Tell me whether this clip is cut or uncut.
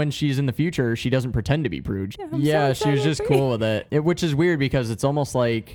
cut